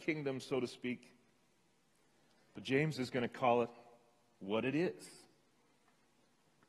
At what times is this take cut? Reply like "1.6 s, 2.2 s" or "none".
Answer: none